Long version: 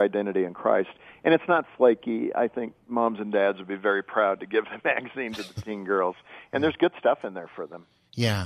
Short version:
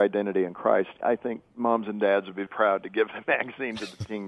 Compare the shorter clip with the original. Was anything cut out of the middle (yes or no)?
yes